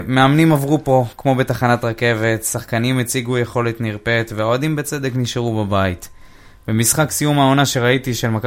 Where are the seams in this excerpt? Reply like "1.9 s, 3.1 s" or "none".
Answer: none